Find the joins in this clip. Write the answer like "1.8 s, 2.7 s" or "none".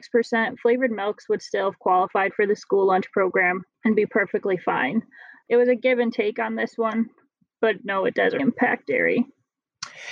5.4 s, 8.4 s